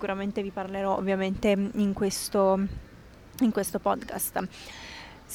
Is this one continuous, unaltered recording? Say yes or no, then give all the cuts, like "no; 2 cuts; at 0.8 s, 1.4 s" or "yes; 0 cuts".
yes; 0 cuts